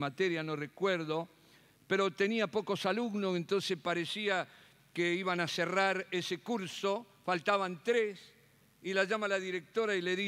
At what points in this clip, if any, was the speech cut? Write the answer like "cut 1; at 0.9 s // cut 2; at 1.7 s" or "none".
none